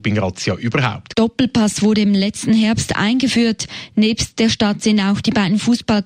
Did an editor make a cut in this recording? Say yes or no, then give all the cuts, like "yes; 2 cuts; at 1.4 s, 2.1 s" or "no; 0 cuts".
yes; 1 cut; at 1.1 s